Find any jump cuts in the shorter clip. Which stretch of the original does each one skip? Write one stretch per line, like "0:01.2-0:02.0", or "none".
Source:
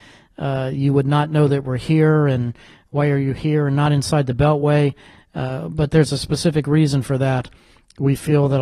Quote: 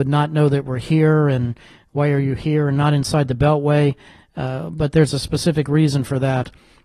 none